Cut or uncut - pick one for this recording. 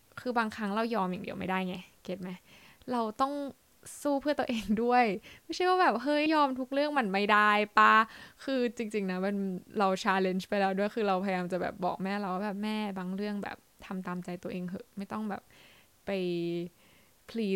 cut